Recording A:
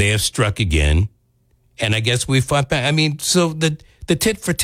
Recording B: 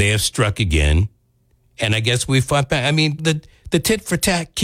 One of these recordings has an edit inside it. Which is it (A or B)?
B